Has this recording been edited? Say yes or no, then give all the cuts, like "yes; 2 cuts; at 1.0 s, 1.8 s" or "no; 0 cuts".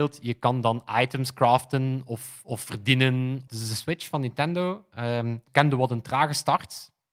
yes; 2 cuts; at 3.5 s, 5.5 s